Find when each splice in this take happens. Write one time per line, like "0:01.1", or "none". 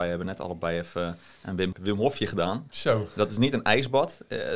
0:01.7